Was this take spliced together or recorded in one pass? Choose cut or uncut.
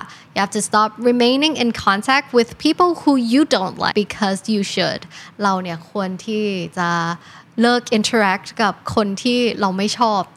cut